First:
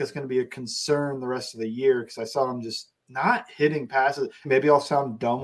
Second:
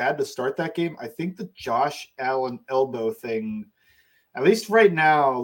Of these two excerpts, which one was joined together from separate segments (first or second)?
first